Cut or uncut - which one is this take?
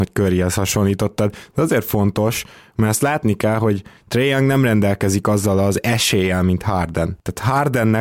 uncut